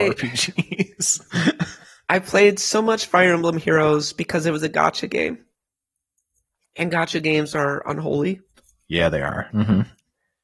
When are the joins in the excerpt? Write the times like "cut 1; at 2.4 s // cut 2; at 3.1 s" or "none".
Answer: cut 1; at 9.5 s